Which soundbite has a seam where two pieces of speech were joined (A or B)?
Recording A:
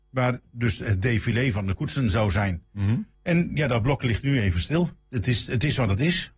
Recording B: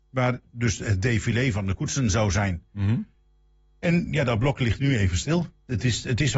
A